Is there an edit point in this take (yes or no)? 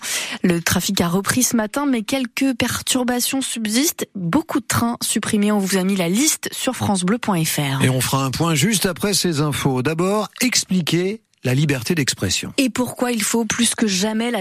no